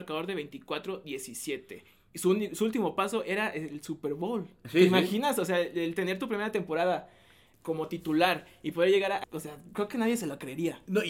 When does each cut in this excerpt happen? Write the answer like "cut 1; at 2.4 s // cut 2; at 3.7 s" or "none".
cut 1; at 7.5 s // cut 2; at 9.2 s